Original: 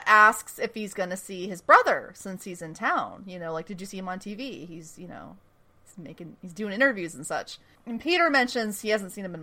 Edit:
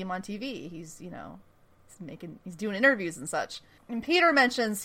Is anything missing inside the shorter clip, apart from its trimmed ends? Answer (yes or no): no